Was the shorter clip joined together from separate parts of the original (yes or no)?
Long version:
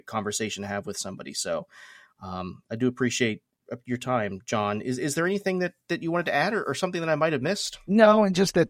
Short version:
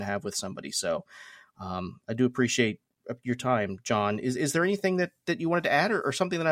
no